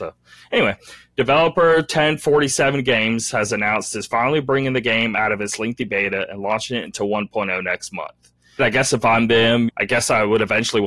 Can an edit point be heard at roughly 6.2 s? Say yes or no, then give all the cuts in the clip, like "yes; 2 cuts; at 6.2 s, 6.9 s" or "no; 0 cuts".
no; 2 cuts; at 8.6 s, 9.7 s